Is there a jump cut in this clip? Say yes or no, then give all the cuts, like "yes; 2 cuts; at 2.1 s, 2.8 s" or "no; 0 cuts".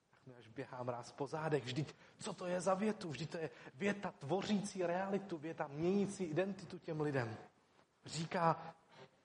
yes; 1 cut; at 8.0 s